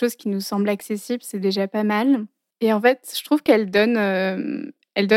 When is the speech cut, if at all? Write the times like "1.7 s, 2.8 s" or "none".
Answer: 2.5 s